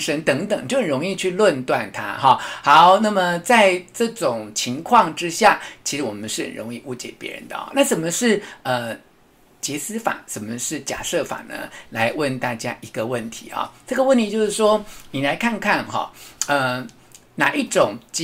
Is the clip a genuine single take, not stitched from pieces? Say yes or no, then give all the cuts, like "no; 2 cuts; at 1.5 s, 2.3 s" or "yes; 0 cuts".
yes; 0 cuts